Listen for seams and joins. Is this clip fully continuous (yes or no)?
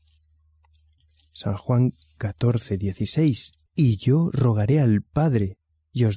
no